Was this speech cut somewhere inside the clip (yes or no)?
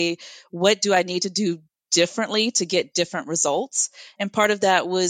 no